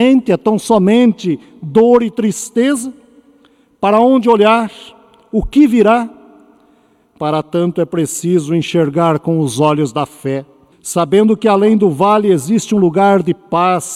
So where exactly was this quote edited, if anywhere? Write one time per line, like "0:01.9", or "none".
0:10.7